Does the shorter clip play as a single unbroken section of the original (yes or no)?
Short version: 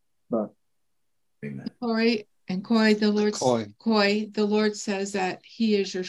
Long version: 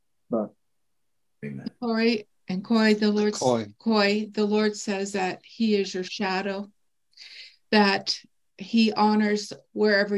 yes